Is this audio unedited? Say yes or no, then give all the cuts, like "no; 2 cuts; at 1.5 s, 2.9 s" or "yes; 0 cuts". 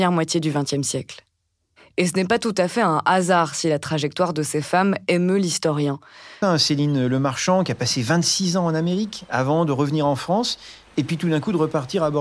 no; 1 cut; at 6.4 s